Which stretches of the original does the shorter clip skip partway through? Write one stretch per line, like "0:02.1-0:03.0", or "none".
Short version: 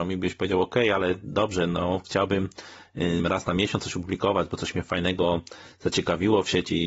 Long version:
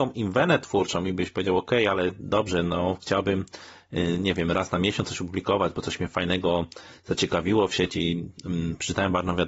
0:04.2-0:04.4